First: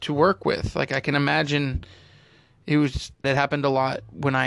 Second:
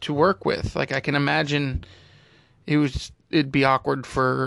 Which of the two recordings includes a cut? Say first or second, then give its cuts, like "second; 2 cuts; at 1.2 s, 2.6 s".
first; 1 cut; at 3.2 s